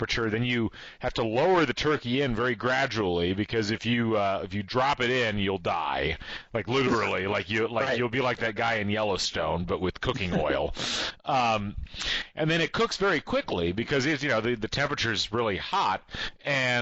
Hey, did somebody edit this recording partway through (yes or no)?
no